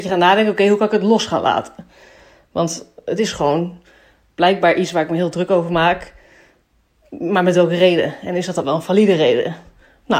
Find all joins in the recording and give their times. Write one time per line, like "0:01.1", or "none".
none

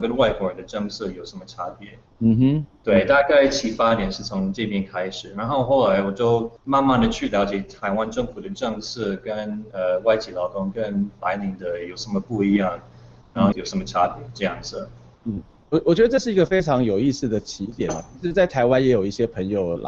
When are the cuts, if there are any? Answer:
0:06.6
0:13.5

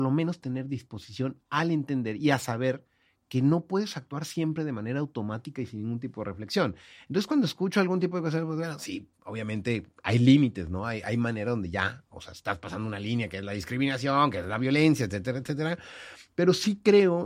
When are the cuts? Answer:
none

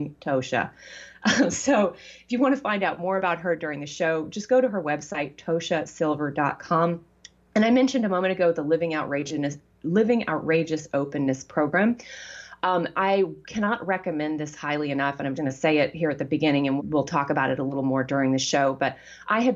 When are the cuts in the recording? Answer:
0:15.4
0:16.8

